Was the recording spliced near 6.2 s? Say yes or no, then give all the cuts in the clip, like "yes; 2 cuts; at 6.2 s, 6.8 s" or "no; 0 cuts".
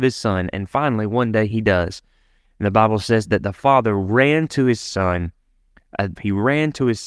yes; 1 cut; at 6.2 s